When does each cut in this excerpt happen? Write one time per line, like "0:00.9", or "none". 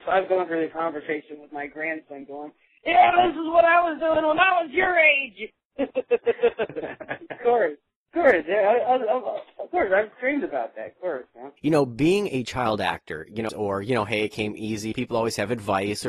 0:11.6
0:13.5
0:14.9